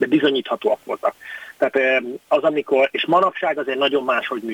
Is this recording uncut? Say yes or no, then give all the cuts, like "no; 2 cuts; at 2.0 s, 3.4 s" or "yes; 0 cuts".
yes; 0 cuts